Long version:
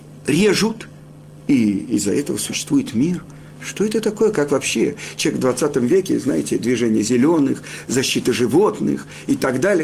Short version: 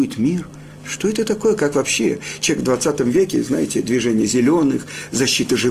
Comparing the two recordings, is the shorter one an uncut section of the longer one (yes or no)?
yes